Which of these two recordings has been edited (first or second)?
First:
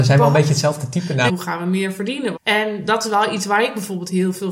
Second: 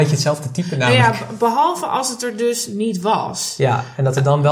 first